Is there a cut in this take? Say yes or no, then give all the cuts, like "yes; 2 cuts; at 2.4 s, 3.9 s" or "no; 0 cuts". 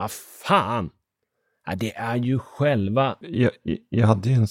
yes; 1 cut; at 3.2 s